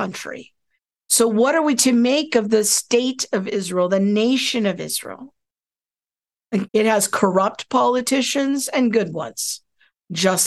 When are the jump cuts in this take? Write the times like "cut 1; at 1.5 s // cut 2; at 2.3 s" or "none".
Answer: cut 1; at 0.9 s // cut 2; at 6.7 s